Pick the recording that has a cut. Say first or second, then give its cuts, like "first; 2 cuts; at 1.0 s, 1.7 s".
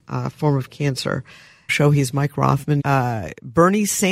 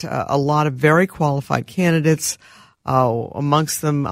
first; 2 cuts; at 1.7 s, 2.8 s